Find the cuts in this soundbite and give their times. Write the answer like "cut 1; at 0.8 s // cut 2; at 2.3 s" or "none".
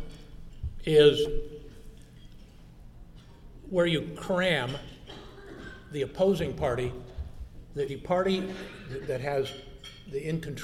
cut 1; at 7.9 s

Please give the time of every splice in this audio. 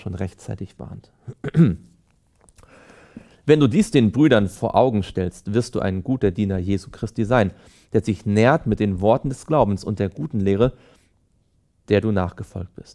none

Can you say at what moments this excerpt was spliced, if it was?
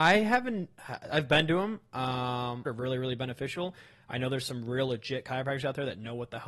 cut 1; at 2.7 s

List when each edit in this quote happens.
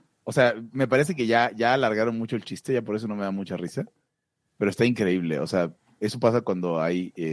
none

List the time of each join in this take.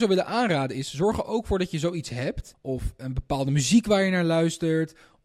cut 1; at 2.5 s

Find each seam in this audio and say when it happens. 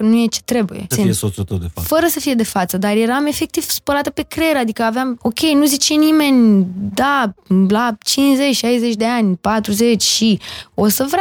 cut 1; at 0.9 s // cut 2; at 5.2 s

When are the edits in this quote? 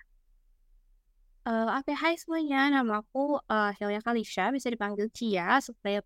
none

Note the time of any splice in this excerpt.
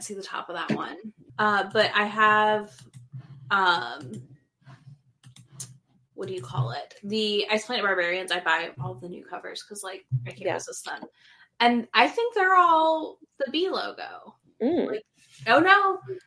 cut 1; at 1.3 s

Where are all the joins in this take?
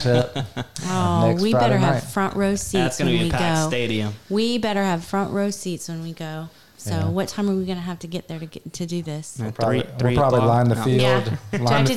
none

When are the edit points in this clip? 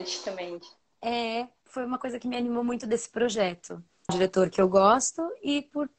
cut 1; at 1.7 s // cut 2; at 4.1 s

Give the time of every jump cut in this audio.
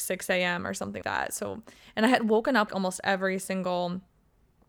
cut 1; at 1.0 s // cut 2; at 2.7 s

